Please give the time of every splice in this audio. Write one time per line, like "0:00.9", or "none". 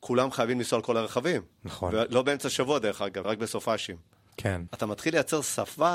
0:01.5
0:03.2
0:04.7

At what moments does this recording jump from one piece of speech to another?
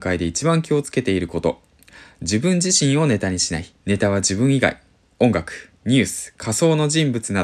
0:03.8

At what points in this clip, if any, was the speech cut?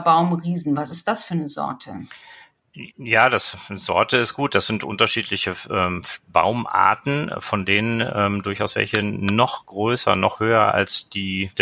none

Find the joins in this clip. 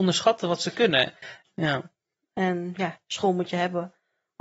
0:01.5

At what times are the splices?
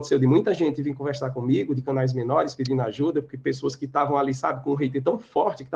none

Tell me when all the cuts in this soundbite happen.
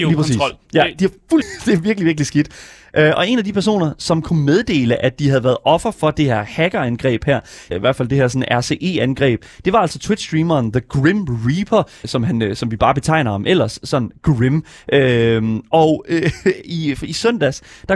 0:01.4
0:07.7
0:12.0

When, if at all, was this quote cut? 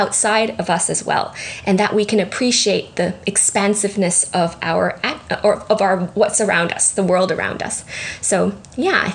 none

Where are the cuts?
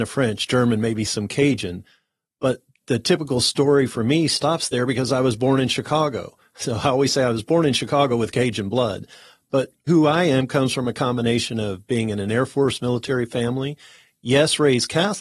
0:09.9

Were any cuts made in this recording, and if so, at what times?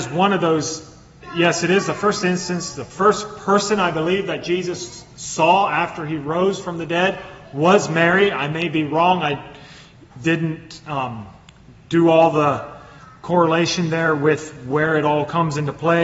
none

